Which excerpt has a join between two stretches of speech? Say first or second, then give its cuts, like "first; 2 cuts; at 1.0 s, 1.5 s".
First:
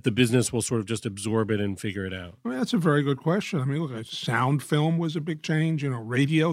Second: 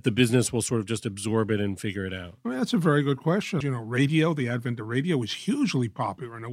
second; 1 cut; at 3.6 s